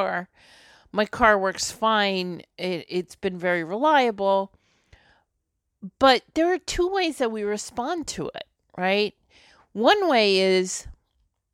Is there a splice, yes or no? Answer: no